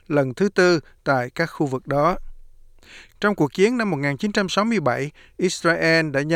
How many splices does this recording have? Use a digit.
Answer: 1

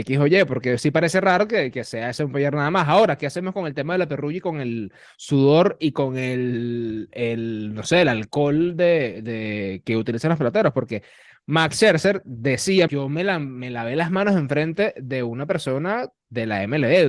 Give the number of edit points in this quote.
1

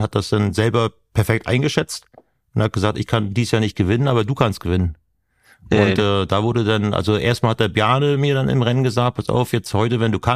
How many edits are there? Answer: 0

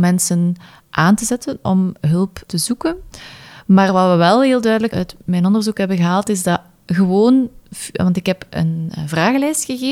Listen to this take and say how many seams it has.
1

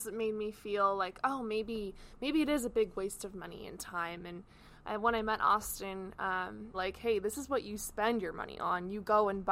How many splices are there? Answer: 1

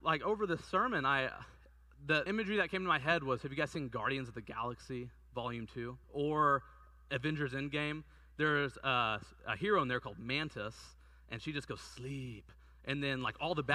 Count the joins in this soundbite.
2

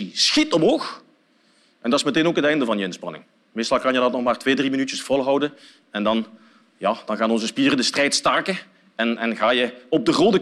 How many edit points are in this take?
0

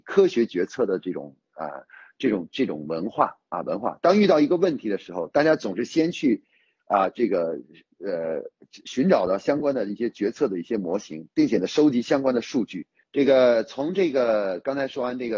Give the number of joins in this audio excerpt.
1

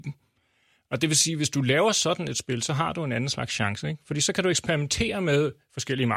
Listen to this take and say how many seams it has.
0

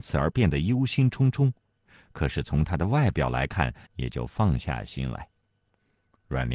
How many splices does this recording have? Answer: 1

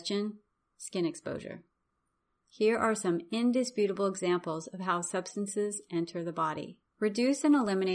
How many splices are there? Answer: 1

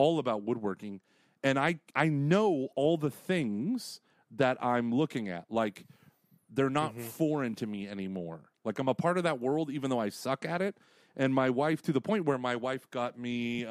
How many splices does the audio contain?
1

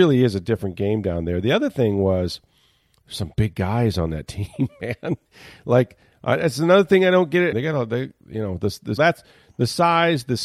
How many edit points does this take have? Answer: 2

